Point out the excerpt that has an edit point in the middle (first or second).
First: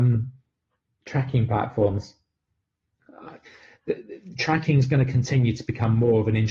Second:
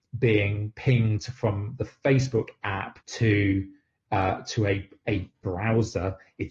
second